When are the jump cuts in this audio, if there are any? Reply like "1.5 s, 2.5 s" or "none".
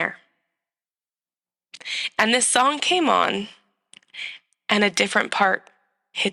none